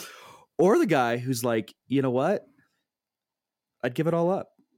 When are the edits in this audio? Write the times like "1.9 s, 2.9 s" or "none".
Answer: 3.7 s

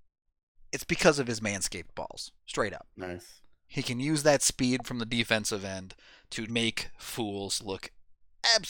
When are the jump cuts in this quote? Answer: 2.4 s, 3.7 s, 6.5 s

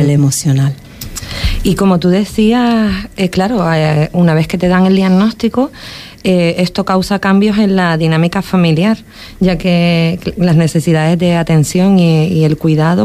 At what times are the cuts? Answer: none

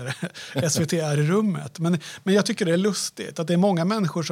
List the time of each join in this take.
none

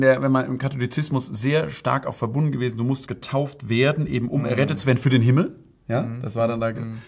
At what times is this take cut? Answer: none

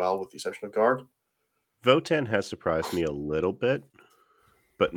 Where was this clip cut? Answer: none

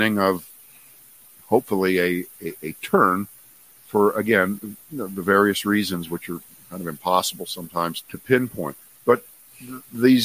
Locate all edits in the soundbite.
2.4 s, 8.0 s

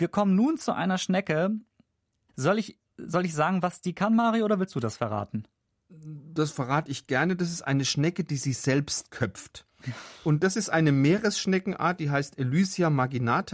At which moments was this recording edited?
2.3 s

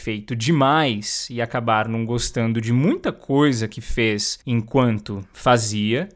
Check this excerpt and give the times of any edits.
4.4 s

